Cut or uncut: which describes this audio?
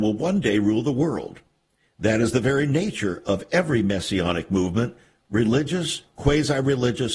uncut